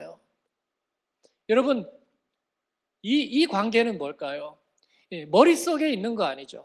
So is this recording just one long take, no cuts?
yes; 0 cuts

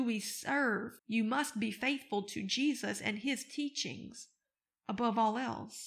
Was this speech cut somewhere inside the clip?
yes; 1 cut; at 1.0 s

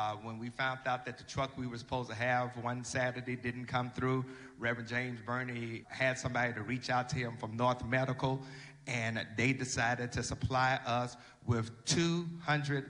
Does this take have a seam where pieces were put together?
yes; 1 cut; at 5.8 s

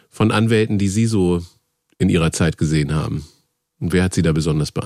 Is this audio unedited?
yes; 0 cuts

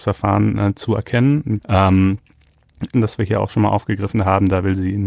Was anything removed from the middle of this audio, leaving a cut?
yes; 2 cuts; at 1.6 s, 2.9 s

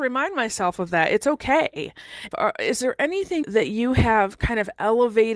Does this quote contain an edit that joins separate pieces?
yes; 2 cuts; at 2.3 s, 3.4 s

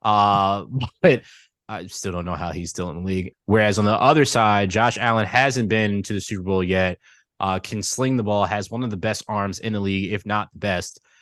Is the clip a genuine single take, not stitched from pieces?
no; 1 cut; at 3.3 s

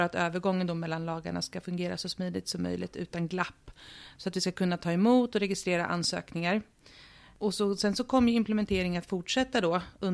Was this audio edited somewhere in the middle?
no; 0 cuts

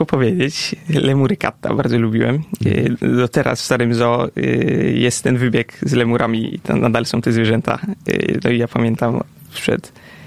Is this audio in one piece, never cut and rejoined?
yes; 0 cuts

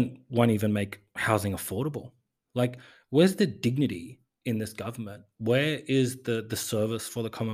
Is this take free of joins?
yes; 0 cuts

